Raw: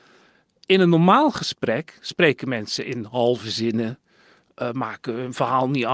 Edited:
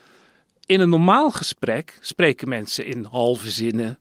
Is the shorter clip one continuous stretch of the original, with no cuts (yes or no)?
yes